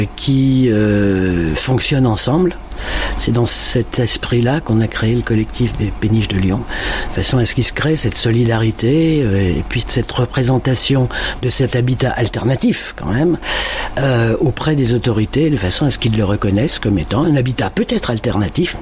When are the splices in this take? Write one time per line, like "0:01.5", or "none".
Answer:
0:09.8